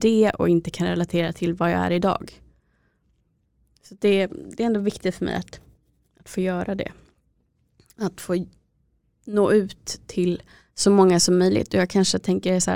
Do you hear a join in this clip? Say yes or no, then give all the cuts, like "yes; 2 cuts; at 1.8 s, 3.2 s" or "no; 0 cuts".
no; 0 cuts